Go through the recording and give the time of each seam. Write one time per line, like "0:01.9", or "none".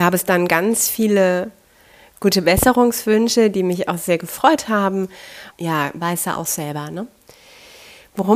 0:05.5